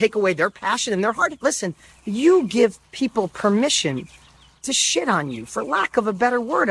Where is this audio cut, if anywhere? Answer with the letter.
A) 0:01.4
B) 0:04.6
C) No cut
A